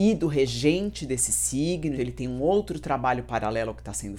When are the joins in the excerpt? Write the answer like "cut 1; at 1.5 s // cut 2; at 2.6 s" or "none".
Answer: cut 1; at 2.0 s